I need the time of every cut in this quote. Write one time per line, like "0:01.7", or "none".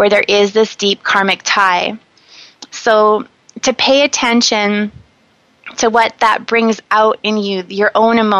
0:02.7